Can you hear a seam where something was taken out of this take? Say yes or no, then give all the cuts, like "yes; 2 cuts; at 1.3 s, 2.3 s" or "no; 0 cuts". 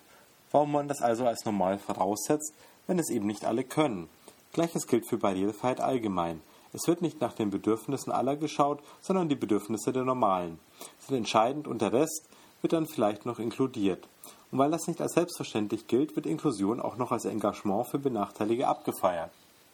no; 0 cuts